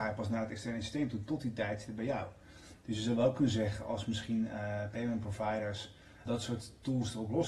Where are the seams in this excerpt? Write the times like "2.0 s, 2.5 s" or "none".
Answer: 6.3 s